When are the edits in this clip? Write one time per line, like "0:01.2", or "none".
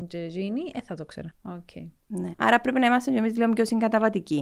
0:01.3
0:02.3